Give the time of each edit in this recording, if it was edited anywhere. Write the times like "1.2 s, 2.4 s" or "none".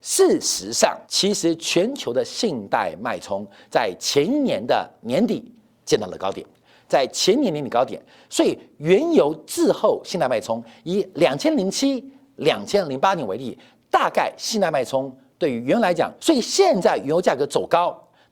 1.0 s, 16.2 s